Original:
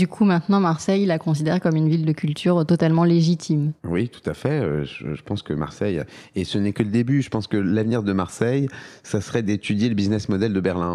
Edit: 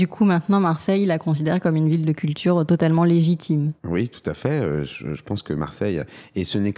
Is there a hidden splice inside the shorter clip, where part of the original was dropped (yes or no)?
no